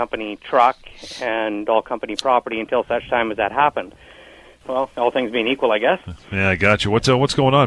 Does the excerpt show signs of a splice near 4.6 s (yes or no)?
yes